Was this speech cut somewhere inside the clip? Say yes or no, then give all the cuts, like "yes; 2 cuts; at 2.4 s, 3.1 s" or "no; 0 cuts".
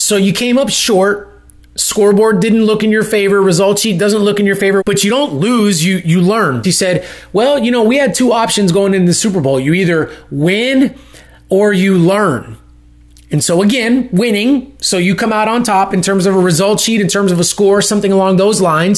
yes; 2 cuts; at 4.8 s, 6.6 s